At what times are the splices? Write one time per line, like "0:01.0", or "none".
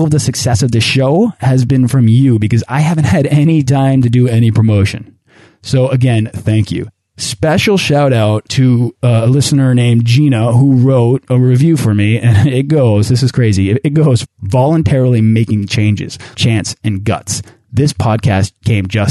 0:14.2
0:16.3